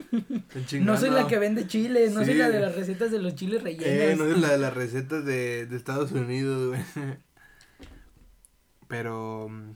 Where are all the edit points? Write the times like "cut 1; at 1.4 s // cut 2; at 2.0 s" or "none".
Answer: cut 1; at 4.3 s

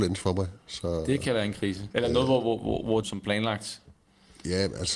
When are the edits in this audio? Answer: cut 1; at 1.9 s // cut 2; at 3.0 s

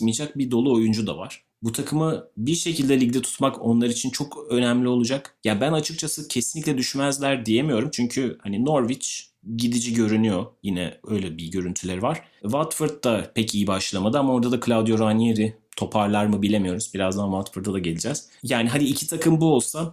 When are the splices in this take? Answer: cut 1; at 1.5 s

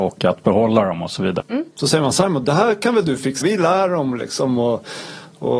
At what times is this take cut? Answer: cut 1; at 1.4 s // cut 2; at 3.4 s

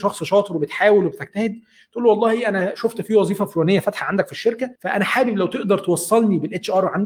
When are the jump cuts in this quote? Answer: cut 1; at 4.8 s

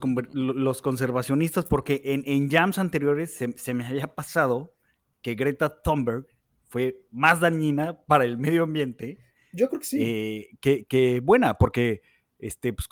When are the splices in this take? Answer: none

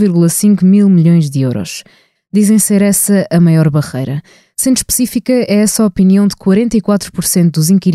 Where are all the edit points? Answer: cut 1; at 2.2 s

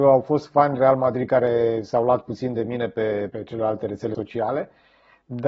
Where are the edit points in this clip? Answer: cut 1; at 3.3 s

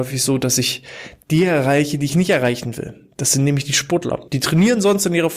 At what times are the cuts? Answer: cut 1; at 2.1 s // cut 2; at 4.3 s

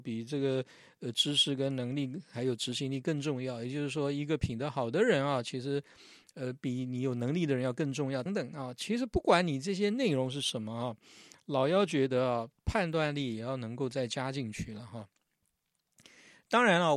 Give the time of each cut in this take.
cut 1; at 8.3 s

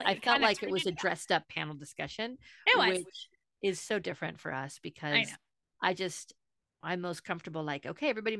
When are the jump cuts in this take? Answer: cut 1; at 6.8 s

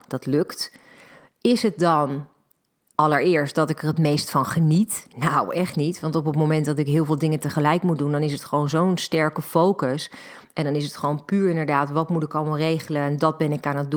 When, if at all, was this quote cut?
none

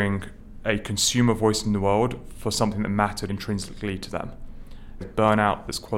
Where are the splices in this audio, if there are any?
cut 1; at 3.3 s // cut 2; at 5.0 s

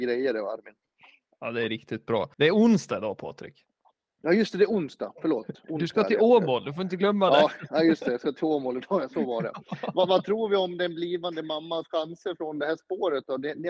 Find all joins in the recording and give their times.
cut 1; at 2.3 s

